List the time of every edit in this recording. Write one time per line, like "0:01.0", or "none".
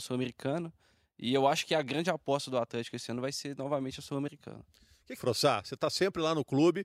0:05.2